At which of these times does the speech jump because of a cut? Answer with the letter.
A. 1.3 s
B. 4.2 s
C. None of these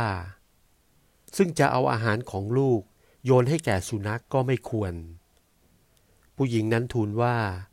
B